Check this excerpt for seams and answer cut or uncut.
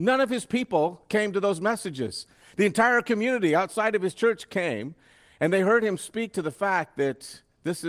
uncut